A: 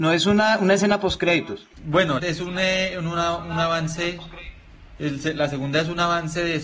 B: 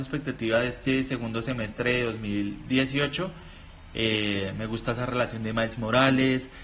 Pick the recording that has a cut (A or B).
A